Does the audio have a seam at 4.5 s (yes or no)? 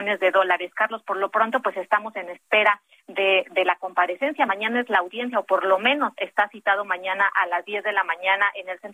no